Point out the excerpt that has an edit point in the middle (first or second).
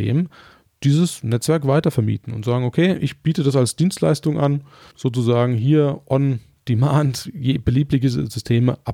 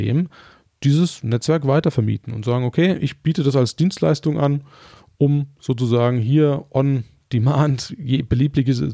first